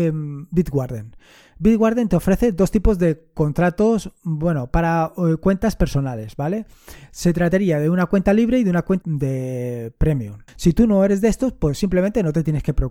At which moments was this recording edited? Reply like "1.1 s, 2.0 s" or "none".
9.0 s, 10.5 s